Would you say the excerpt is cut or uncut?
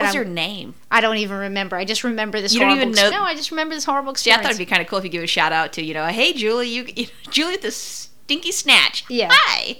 cut